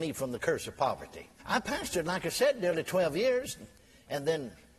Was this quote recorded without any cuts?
no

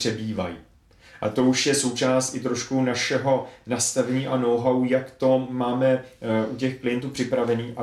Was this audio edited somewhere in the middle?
no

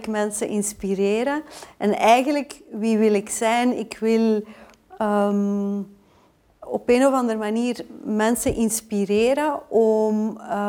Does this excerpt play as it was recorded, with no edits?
yes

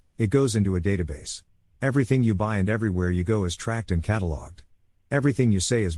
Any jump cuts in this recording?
yes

